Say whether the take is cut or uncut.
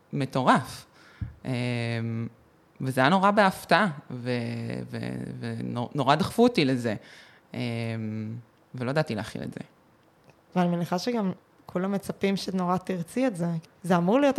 cut